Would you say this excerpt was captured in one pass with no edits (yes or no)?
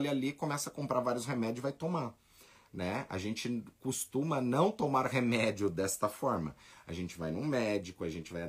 yes